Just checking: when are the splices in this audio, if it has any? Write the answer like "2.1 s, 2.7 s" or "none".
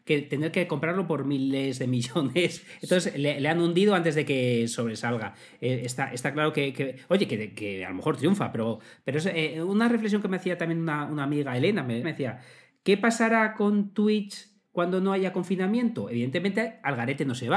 12.0 s